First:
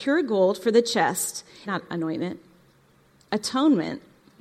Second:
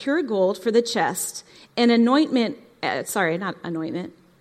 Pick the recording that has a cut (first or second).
first